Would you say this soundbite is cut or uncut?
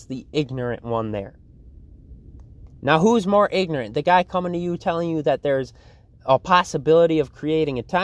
cut